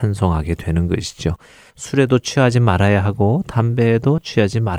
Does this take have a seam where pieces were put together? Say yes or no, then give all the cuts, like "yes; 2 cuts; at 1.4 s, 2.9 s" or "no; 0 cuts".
yes; 1 cut; at 1.7 s